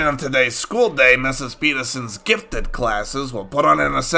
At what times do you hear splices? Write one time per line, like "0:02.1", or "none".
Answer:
none